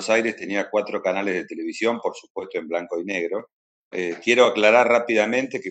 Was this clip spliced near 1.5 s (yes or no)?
no